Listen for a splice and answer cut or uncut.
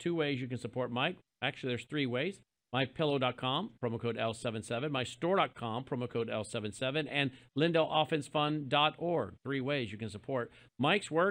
uncut